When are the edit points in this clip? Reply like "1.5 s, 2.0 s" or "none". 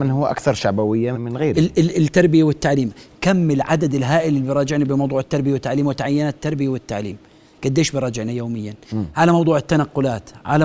1.1 s, 3.1 s